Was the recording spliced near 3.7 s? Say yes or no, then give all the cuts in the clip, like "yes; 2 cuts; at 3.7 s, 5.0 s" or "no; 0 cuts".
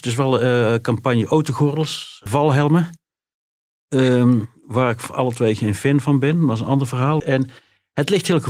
no; 2 cuts; at 2.3 s, 7.2 s